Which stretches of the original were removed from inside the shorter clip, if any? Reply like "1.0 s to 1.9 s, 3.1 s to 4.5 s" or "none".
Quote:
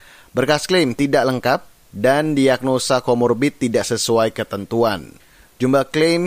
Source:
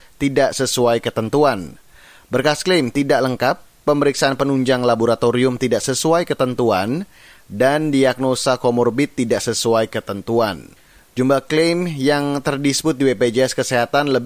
3.8 s to 7.4 s